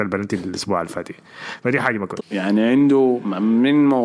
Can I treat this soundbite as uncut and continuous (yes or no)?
no